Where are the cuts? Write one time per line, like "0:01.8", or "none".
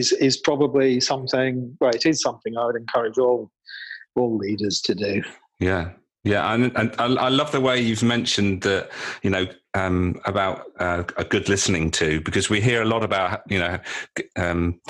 none